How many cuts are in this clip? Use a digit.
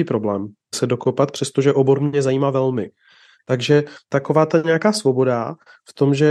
0